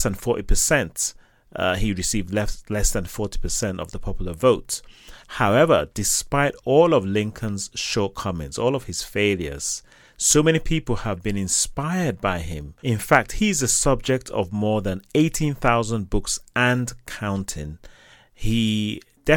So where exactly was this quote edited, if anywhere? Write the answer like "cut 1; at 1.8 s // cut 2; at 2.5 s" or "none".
cut 1; at 5.2 s